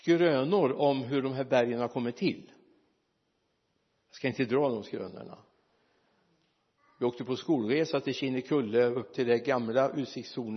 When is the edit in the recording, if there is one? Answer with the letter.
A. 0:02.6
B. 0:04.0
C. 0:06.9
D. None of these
D